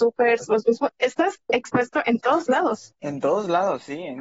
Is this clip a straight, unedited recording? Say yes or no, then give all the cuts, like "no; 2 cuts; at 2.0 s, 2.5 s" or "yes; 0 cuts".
yes; 0 cuts